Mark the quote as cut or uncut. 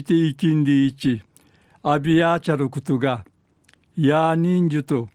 uncut